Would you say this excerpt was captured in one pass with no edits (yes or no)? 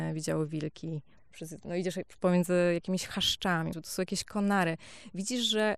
no